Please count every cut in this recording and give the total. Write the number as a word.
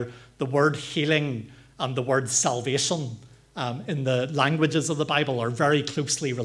one